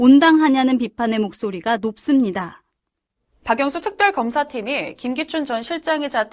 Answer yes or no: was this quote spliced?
yes